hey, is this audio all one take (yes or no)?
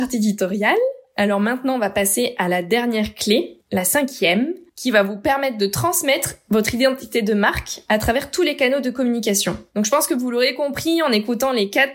yes